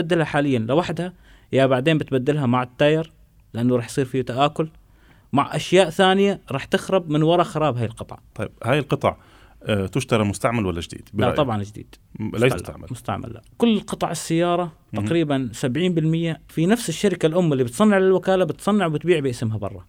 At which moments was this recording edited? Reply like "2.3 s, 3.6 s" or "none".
12.5 s